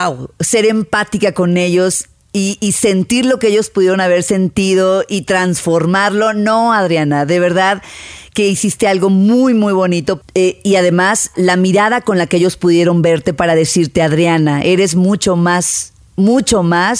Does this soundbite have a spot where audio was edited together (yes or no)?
yes